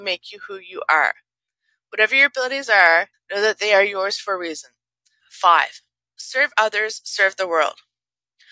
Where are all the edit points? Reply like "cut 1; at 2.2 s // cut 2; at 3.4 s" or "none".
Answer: cut 1; at 3.1 s // cut 2; at 5.2 s